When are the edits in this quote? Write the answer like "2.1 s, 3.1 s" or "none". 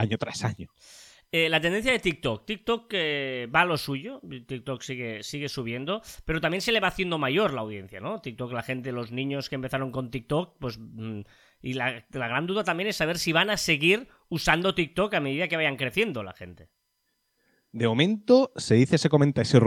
none